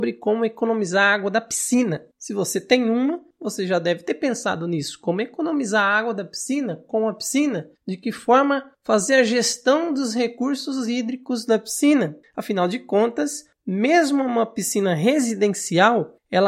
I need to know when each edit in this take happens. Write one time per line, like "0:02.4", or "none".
none